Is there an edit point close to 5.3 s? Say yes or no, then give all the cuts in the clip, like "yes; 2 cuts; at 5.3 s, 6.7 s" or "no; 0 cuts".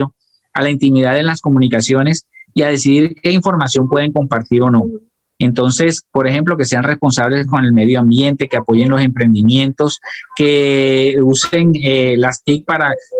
yes; 1 cut; at 5.3 s